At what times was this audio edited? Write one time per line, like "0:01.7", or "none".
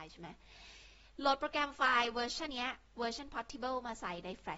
0:02.5

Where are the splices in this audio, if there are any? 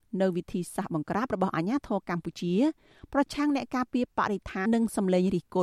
0:04.7

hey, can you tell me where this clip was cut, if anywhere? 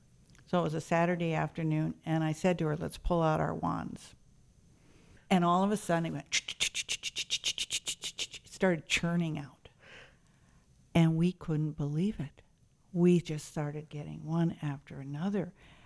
none

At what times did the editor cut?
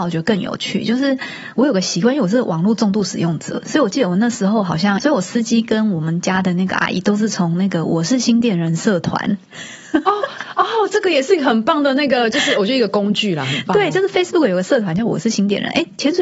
0:05.0

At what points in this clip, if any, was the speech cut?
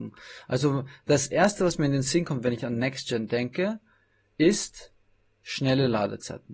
none

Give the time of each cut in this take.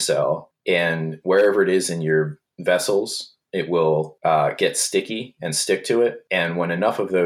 none

